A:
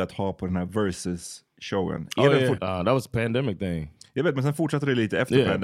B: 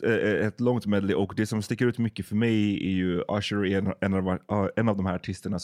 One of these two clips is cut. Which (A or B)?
A